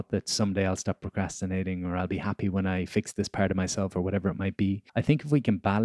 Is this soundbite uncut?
no; 1 cut; at 4.9 s

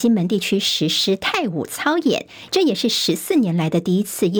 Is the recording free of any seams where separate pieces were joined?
no; 1 cut; at 2.5 s

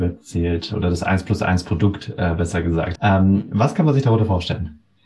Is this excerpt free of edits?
no; 1 cut; at 3.0 s

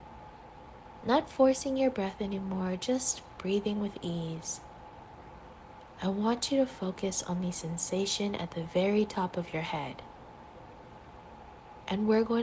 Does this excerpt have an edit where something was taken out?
no; 0 cuts

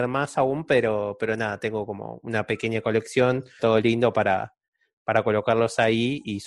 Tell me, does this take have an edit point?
yes; 1 cut; at 3.6 s

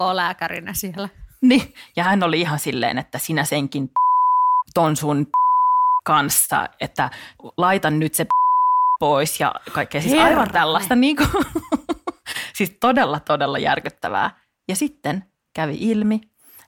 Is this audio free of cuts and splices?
yes; 0 cuts

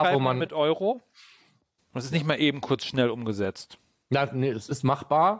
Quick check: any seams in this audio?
yes; 1 cut; at 1.8 s

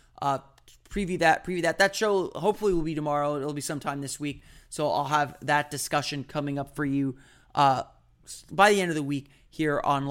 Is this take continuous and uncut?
yes; 0 cuts

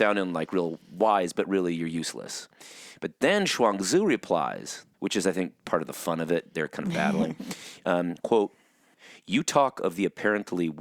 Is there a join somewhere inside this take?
yes; 1 cut; at 4.9 s

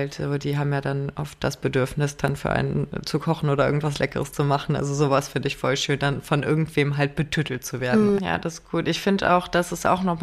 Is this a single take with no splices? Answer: no; 1 cut; at 8.2 s

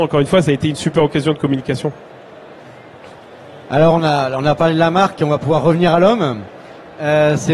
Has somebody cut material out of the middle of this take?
yes; 1 cut; at 3.6 s

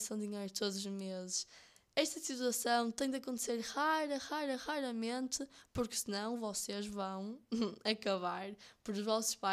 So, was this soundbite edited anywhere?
no; 0 cuts

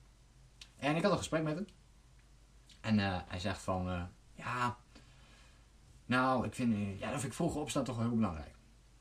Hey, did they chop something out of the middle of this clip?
no; 0 cuts

